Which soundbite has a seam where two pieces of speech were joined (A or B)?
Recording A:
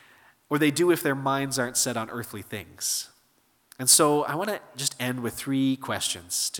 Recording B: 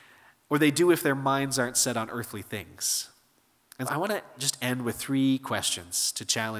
B